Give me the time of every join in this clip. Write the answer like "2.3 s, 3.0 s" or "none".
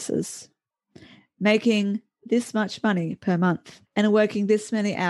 3.9 s